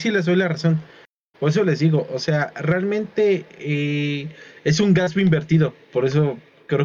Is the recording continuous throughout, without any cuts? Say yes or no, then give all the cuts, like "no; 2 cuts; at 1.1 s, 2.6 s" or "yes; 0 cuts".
yes; 0 cuts